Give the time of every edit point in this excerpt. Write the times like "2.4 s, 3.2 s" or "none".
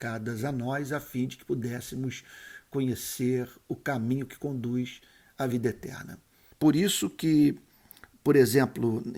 6.5 s

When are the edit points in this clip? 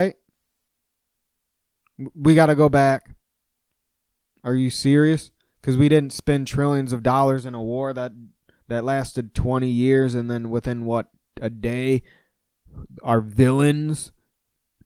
none

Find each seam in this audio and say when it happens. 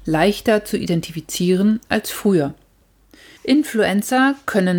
none

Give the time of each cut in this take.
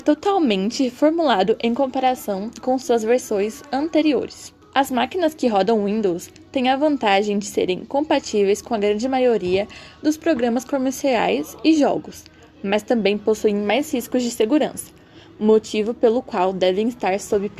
4.6 s

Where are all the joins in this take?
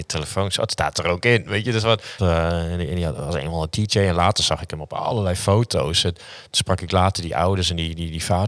2.2 s

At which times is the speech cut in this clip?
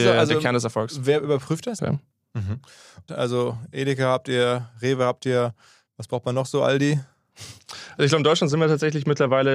1.8 s, 3.1 s

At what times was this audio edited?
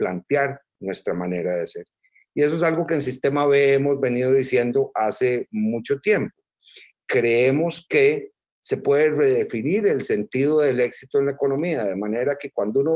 none

